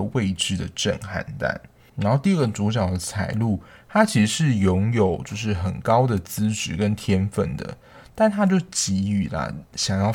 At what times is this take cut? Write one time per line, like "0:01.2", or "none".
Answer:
none